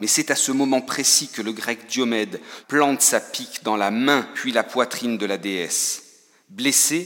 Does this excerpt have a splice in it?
yes; 1 cut; at 2.6 s

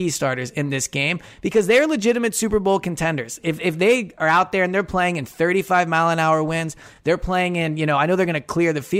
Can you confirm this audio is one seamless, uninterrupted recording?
yes; 0 cuts

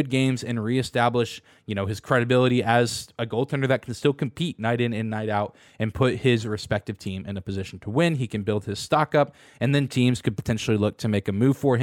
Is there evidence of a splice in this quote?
no; 0 cuts

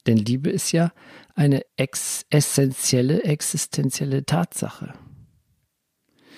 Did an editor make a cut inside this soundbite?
yes; 1 cut; at 1.7 s

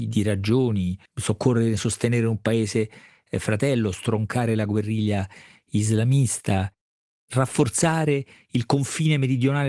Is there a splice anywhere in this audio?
yes; 1 cut; at 1.1 s

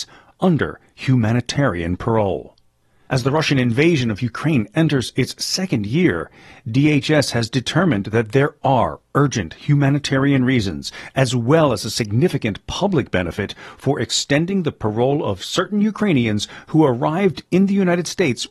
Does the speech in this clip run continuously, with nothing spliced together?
no; 1 cut; at 3.1 s

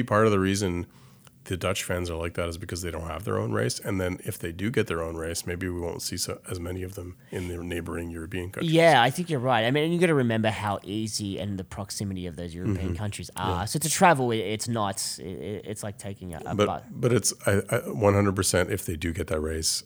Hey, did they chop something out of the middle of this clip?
no; 0 cuts

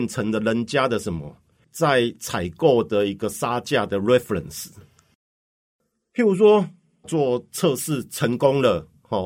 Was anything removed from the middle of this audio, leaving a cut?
yes; 1 cut; at 7.0 s

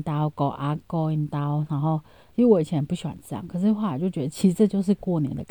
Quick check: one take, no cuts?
no; 1 cut; at 2.3 s

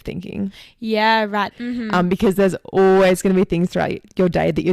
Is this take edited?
yes; 1 cut; at 1.5 s

